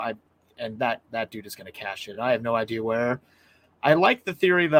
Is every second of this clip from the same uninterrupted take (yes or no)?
yes